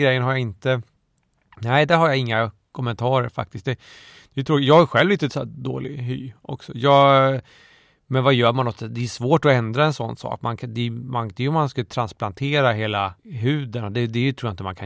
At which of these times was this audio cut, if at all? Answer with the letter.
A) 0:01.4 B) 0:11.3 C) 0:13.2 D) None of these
C